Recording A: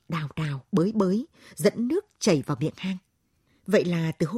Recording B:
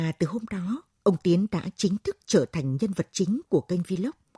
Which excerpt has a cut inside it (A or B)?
A